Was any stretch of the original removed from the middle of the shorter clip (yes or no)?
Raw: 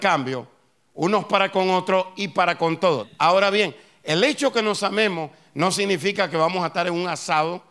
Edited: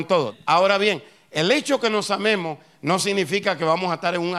no